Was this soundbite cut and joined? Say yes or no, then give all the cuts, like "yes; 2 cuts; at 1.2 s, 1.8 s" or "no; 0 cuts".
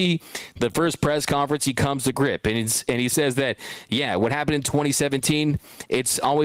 no; 0 cuts